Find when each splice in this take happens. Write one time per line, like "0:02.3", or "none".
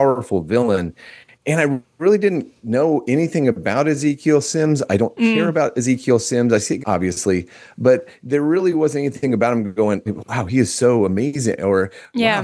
0:06.8
0:10.1